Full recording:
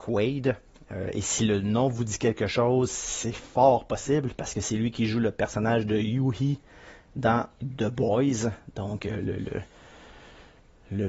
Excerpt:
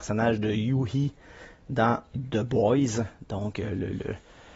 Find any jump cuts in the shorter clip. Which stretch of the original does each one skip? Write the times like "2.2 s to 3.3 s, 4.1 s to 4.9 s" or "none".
none